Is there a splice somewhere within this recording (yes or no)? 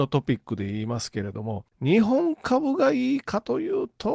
no